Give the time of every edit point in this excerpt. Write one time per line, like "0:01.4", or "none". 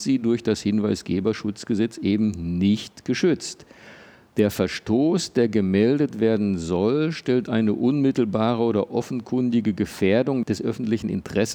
0:04.3